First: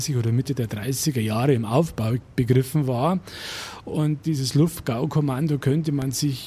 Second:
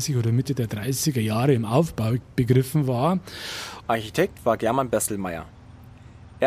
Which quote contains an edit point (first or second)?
second